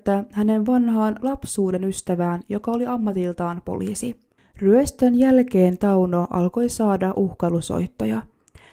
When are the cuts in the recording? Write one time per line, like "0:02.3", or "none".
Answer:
0:04.4

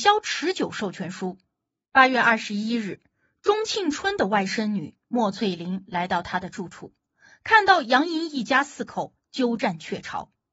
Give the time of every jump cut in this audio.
0:01.8

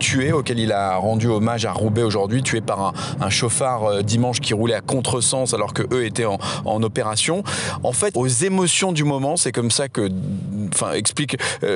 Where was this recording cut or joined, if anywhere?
0:04.4
0:08.1

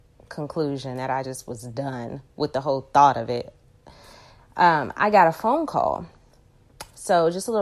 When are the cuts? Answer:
none

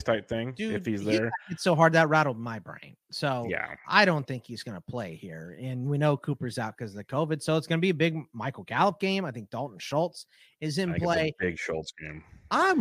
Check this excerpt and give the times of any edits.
0:03.8

